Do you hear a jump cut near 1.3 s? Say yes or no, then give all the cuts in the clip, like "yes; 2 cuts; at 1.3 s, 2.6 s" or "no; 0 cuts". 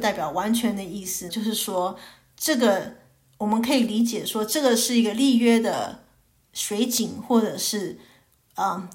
yes; 1 cut; at 1.3 s